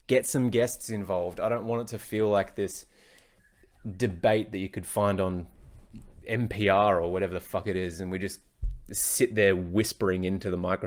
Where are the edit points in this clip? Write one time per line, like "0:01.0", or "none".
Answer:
none